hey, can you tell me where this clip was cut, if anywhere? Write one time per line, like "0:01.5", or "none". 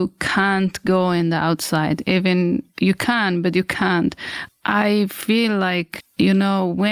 0:04.5
0:06.0